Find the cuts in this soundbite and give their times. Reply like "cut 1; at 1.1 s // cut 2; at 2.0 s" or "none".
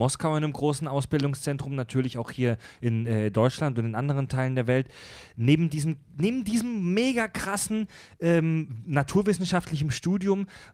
none